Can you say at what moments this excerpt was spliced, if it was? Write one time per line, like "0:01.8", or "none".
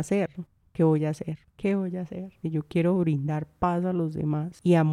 0:02.4